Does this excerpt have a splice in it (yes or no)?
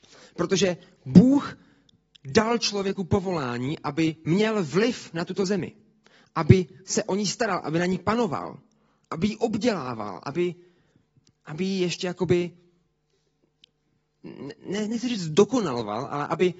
no